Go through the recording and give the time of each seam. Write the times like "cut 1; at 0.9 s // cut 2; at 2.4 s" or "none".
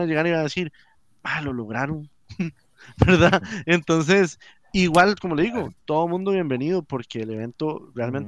none